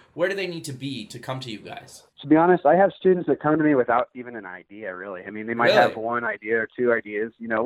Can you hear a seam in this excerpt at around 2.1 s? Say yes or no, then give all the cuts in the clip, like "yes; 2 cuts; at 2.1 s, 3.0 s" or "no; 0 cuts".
yes; 1 cut; at 2.1 s